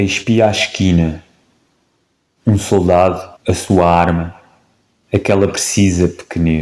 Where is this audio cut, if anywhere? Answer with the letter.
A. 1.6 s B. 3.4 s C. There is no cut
B